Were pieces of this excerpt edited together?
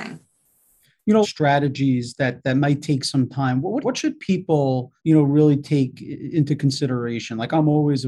yes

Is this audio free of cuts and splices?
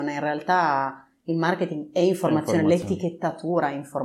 yes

